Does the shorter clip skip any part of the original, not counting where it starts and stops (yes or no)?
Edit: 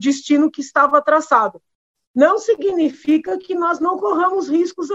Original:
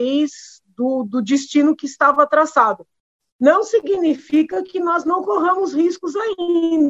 no